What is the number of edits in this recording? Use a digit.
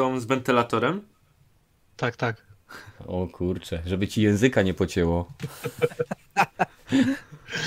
0